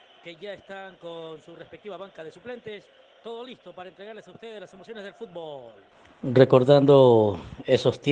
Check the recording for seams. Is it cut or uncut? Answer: uncut